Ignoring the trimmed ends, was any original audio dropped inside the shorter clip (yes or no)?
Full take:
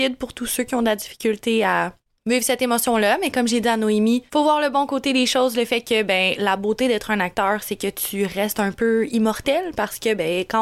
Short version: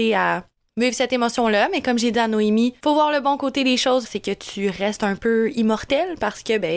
yes